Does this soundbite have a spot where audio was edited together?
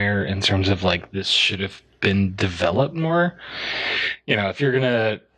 no; 0 cuts

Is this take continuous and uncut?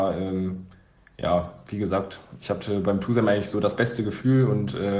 yes; 0 cuts

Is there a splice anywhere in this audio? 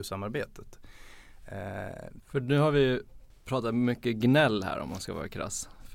yes; 1 cut; at 2.2 s

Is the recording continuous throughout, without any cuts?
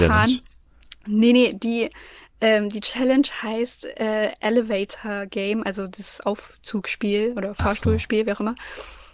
yes; 0 cuts

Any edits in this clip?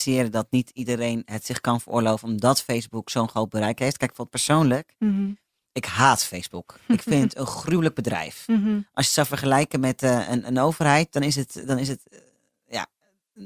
no; 0 cuts

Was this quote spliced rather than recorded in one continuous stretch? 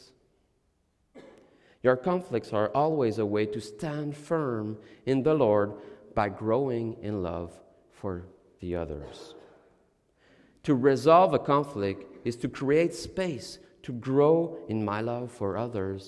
no; 0 cuts

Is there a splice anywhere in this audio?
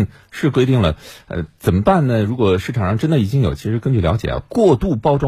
no; 0 cuts

